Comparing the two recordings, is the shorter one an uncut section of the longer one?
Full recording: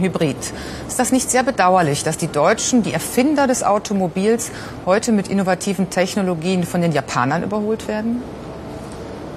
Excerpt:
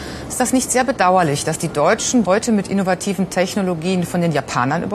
no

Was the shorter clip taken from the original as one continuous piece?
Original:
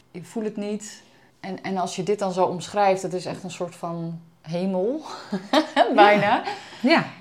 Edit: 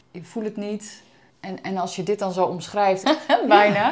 no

